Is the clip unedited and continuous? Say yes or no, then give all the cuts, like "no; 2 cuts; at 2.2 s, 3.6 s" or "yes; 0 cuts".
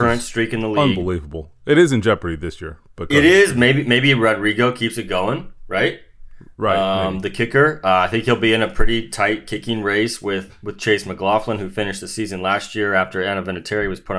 yes; 0 cuts